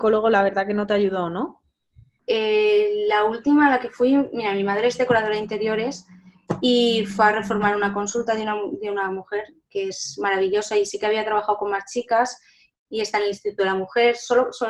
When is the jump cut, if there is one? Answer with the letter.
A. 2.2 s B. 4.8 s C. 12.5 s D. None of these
A